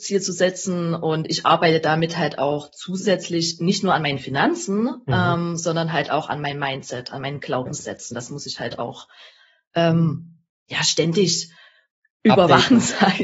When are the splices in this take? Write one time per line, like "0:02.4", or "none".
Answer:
none

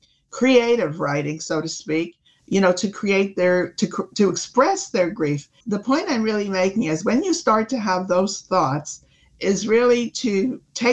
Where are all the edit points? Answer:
0:02.4
0:05.6

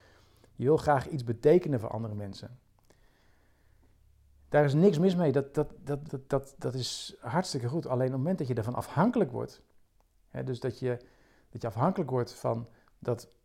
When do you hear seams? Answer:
0:06.1

